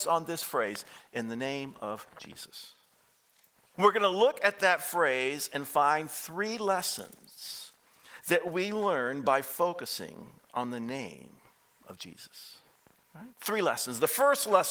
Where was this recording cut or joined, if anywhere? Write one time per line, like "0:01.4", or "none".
0:03.7

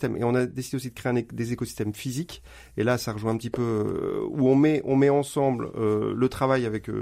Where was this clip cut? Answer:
none

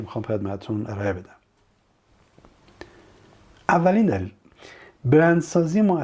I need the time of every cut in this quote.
none

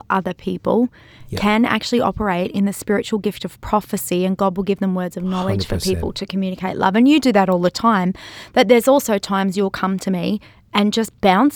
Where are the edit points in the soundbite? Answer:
none

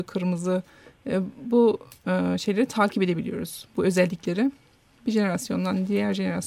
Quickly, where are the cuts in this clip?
none

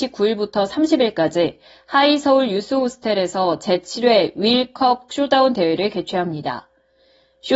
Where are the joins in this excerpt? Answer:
none

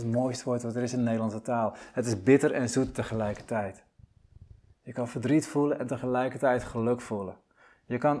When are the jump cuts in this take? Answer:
none

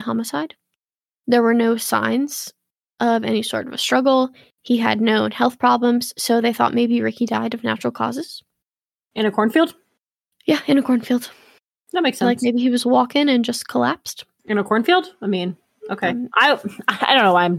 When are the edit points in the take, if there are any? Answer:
none

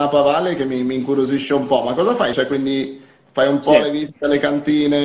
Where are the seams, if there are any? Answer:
0:02.3

